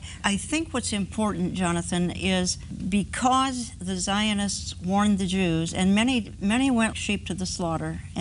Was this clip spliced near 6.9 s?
yes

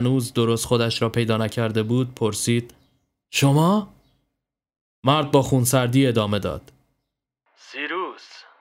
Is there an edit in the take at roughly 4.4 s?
no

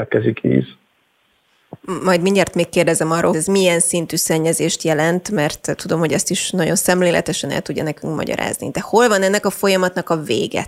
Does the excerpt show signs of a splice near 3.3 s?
yes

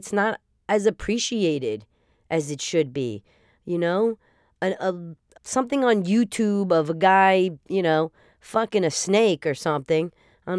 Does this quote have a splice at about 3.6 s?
no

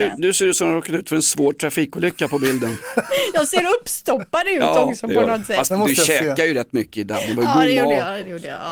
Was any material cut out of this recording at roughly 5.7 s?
yes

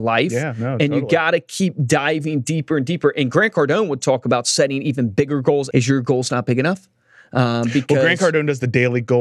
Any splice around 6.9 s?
no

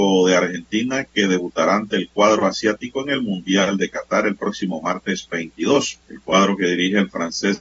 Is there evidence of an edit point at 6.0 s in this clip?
yes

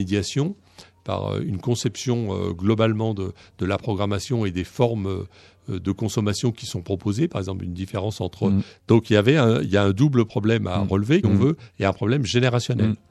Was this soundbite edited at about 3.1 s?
no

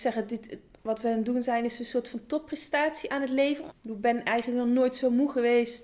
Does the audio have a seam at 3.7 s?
yes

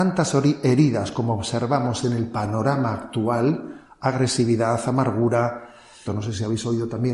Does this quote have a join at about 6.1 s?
yes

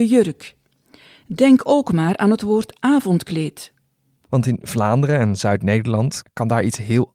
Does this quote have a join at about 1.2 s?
no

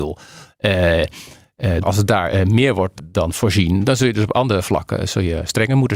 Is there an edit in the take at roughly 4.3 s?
no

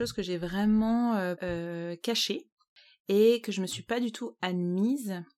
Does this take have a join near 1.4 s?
yes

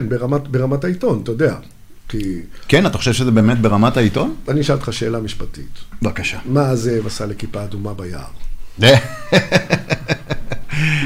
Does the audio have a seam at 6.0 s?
no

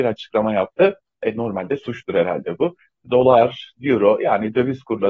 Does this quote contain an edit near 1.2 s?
no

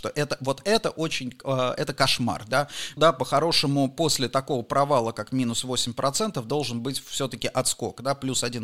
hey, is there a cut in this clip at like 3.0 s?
yes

